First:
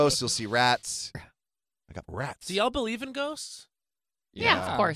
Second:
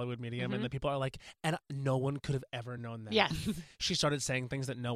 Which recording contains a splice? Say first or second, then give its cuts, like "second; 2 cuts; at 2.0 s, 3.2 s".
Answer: first; 1 cut; at 1.1 s